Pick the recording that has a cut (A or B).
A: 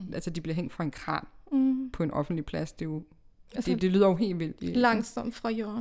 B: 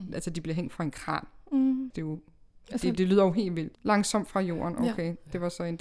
B